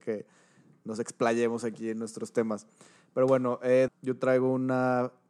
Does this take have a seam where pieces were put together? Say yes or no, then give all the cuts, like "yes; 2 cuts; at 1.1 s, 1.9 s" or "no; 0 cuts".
yes; 1 cut; at 3.9 s